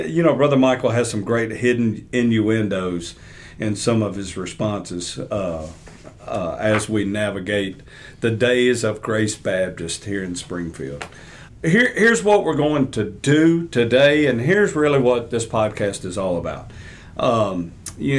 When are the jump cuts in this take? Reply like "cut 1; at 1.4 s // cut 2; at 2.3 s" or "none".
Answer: cut 1; at 11.5 s